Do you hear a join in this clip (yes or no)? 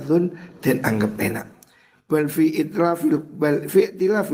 yes